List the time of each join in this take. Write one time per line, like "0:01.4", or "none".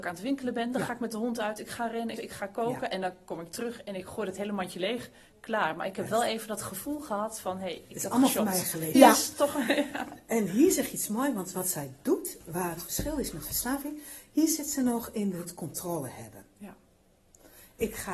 0:02.2
0:08.9